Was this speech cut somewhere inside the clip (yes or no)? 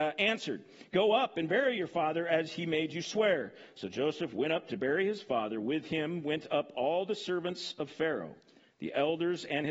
no